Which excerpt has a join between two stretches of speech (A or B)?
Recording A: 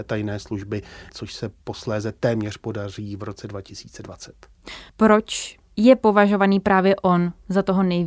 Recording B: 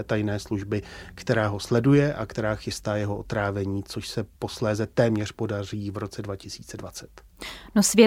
A